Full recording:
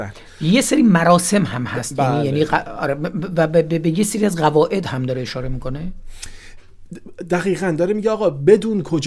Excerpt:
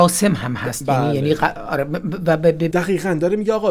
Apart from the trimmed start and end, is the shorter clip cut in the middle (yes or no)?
yes